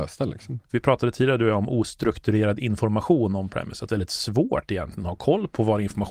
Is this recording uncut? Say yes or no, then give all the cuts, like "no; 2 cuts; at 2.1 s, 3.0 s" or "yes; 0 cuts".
no; 1 cut; at 3.9 s